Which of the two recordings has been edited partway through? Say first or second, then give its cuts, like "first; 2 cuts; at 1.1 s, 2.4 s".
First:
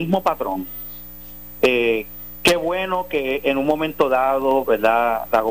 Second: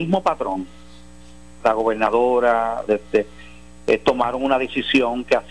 second; 2 cuts; at 1.6 s, 2.9 s